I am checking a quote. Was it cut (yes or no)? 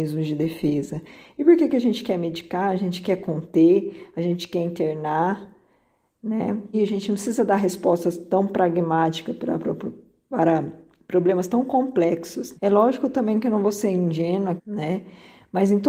yes